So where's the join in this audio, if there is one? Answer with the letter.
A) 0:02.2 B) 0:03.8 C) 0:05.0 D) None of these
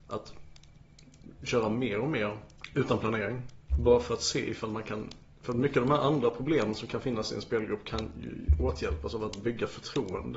D